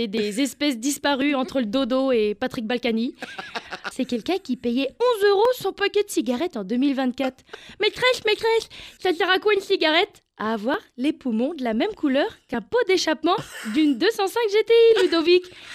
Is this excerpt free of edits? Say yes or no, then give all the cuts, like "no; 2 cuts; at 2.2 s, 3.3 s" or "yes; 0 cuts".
no; 2 cuts; at 3.9 s, 9.0 s